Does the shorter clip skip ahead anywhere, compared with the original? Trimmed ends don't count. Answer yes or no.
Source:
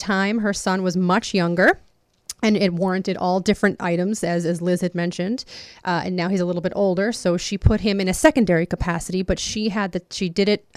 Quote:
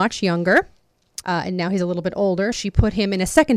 yes